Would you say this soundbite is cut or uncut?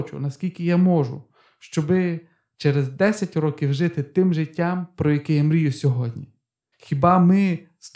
cut